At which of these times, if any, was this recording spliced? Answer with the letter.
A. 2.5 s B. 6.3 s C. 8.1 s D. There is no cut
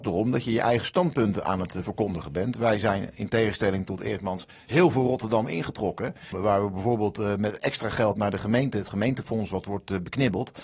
B